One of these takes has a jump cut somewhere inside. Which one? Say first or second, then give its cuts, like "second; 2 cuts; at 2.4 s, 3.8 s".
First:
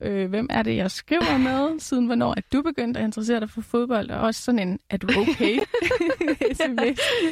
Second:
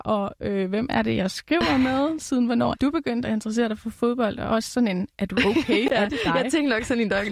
second; 2 cuts; at 2.7 s, 5.9 s